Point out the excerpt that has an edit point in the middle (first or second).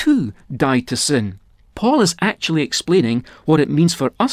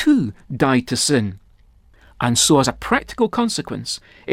first